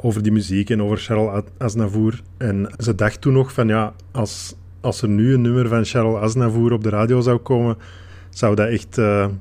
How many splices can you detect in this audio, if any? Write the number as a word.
one